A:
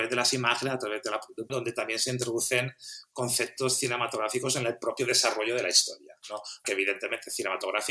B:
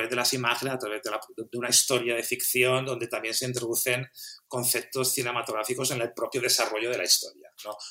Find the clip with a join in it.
A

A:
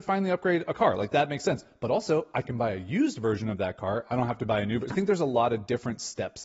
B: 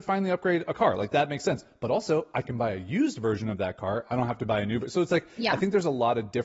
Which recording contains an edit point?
A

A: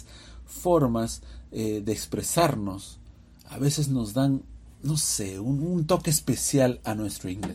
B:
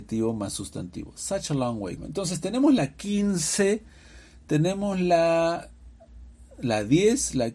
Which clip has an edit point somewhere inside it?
B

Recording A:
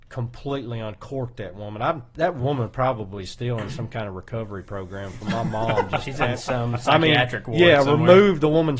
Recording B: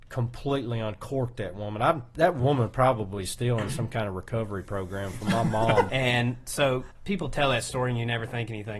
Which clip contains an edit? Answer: B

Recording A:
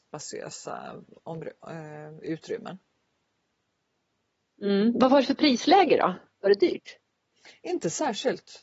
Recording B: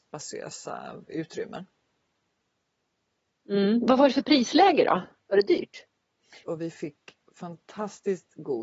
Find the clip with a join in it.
B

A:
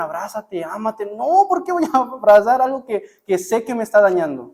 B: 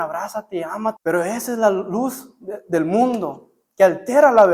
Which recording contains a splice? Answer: B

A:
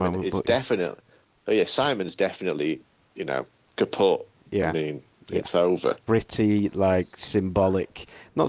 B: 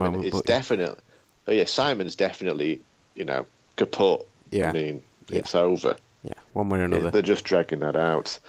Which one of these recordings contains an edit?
A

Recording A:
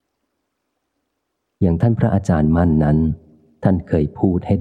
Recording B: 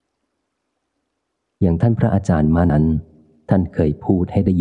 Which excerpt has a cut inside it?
B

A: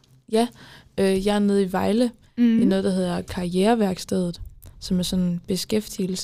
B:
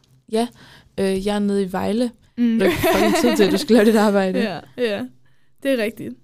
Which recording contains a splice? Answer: B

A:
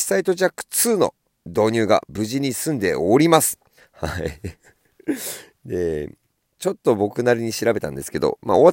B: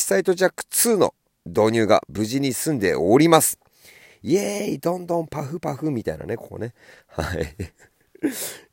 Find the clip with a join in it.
A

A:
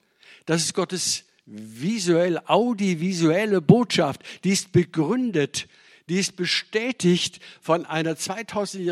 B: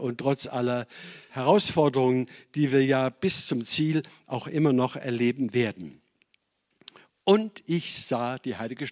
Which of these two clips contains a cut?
B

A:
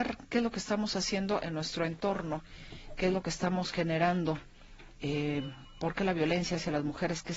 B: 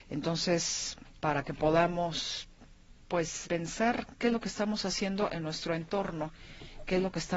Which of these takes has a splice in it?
B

